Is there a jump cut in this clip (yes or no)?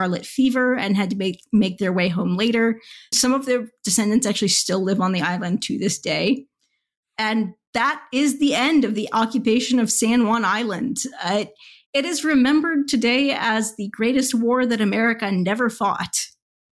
yes